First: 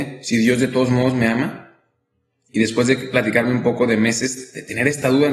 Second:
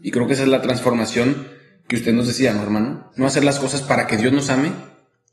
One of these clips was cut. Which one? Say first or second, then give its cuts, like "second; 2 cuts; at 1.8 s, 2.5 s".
second; 1 cut; at 3.1 s